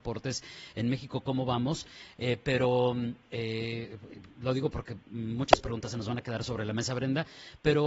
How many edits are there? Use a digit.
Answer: 0